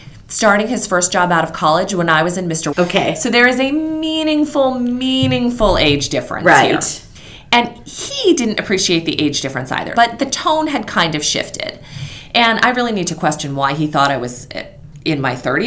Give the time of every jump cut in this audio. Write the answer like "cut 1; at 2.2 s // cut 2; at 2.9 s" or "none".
cut 1; at 2.7 s // cut 2; at 9.9 s